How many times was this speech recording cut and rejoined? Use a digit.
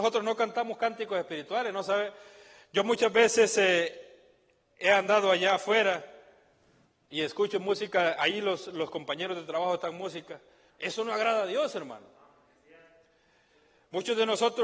1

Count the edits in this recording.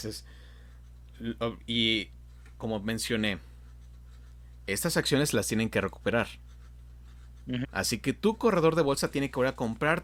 1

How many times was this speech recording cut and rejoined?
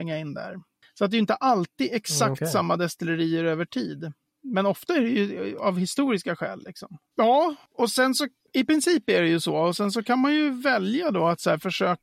2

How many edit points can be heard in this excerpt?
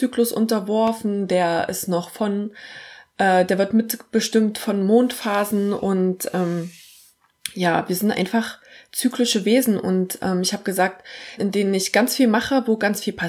1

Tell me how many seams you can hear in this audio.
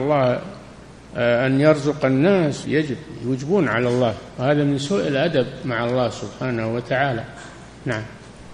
1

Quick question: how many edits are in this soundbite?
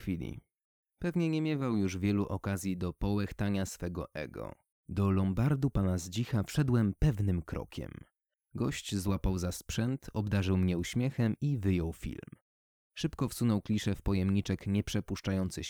2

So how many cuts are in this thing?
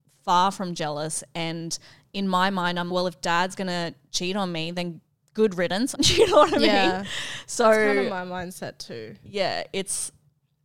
2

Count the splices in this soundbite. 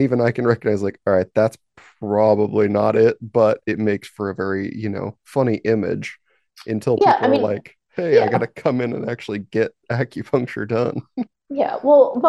0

